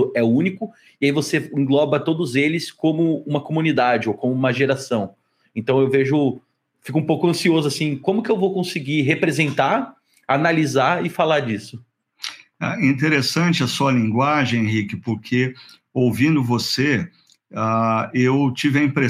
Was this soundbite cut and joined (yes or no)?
no